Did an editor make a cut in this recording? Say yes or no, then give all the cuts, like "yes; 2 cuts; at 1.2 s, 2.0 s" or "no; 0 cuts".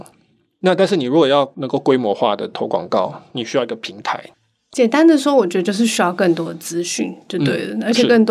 yes; 1 cut; at 3.3 s